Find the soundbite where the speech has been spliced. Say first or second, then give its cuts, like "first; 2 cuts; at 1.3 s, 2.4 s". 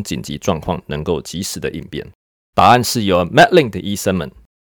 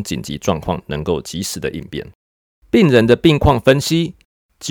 first; 1 cut; at 2.5 s